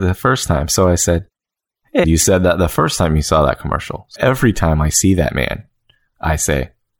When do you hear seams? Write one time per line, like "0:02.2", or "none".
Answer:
0:02.0
0:04.2